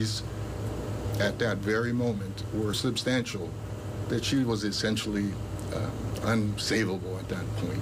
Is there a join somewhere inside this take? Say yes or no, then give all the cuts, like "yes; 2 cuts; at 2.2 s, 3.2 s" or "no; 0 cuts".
yes; 1 cut; at 2.7 s